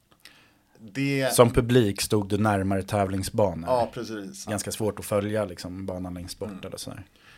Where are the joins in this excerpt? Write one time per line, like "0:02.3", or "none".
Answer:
0:04.5